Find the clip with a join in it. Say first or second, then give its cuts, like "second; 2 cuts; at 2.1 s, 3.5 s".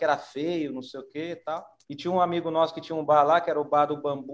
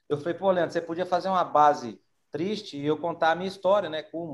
first; 1 cut; at 1.8 s